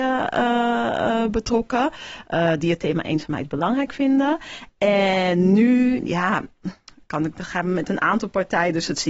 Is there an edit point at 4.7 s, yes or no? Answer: no